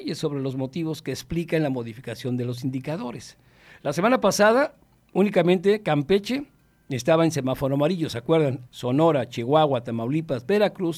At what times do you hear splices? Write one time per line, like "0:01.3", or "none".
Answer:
0:08.7